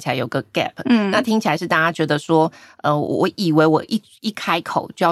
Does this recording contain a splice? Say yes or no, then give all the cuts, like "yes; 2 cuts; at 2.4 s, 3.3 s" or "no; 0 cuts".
no; 0 cuts